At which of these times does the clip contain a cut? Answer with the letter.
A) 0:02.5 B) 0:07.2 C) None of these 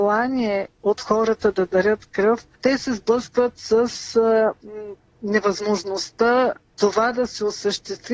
A